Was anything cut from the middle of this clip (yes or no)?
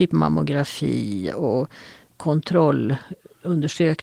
yes